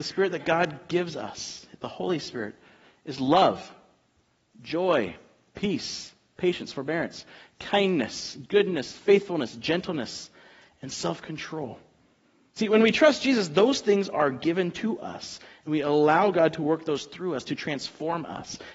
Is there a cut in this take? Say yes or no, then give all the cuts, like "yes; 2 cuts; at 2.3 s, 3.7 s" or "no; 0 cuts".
no; 0 cuts